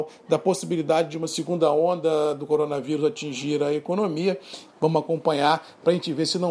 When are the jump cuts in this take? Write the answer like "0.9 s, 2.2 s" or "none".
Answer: 4.7 s